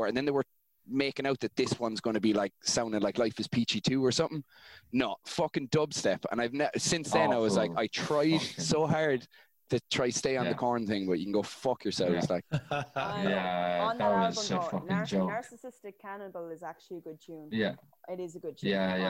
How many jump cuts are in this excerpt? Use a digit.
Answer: 0